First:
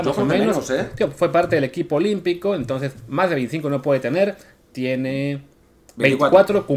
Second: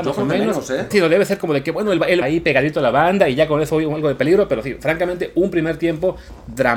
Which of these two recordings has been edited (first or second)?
second